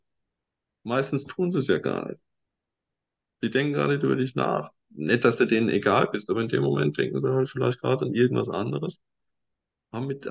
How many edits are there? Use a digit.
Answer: 0